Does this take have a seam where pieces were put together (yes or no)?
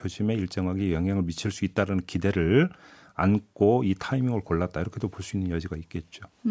no